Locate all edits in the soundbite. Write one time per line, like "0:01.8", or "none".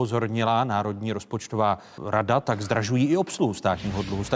0:02.0